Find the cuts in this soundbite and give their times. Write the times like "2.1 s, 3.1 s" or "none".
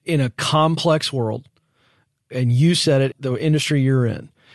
3.1 s